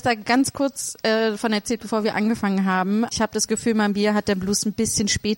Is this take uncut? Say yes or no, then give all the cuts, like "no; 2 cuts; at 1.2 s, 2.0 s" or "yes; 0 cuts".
no; 1 cut; at 3.1 s